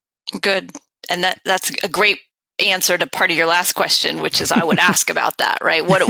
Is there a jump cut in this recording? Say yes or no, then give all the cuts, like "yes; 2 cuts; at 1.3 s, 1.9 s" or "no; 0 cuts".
no; 0 cuts